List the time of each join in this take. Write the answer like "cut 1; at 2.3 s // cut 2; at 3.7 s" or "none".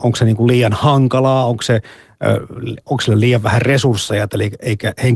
none